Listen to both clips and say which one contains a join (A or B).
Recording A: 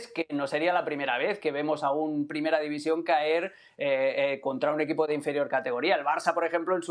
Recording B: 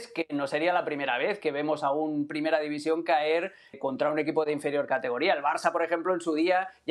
B